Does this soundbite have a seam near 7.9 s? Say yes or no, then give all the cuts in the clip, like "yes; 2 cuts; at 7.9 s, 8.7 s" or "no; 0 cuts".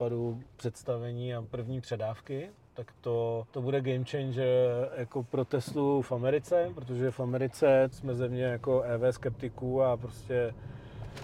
yes; 2 cuts; at 3.5 s, 7.9 s